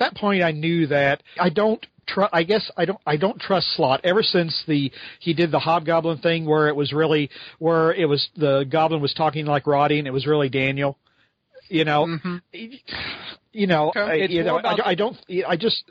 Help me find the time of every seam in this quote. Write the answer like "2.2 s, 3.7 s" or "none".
1.4 s, 13.9 s